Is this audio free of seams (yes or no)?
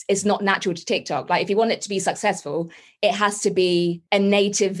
yes